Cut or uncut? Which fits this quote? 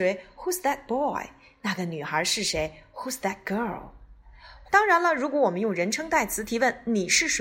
cut